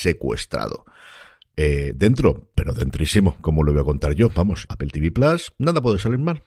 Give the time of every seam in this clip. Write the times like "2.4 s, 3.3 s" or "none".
4.7 s